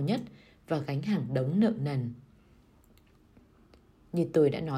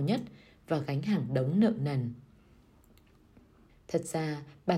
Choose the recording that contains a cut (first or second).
second